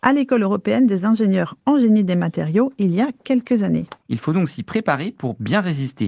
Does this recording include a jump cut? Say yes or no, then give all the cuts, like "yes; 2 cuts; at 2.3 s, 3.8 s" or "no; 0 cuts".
yes; 1 cut; at 4.0 s